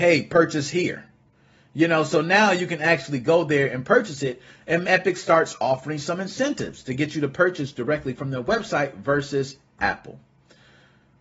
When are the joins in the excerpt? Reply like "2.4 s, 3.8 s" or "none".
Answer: 4.8 s